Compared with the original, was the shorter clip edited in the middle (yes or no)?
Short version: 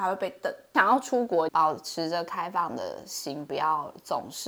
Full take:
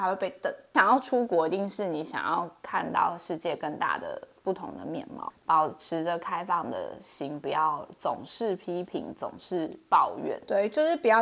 yes